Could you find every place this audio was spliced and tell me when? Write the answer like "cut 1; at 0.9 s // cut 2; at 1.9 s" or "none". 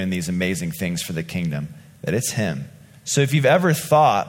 cut 1; at 2.9 s